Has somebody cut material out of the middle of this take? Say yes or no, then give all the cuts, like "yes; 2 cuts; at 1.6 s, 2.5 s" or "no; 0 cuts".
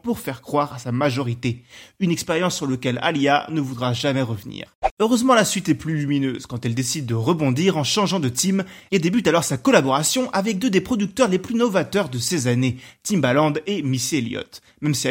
no; 0 cuts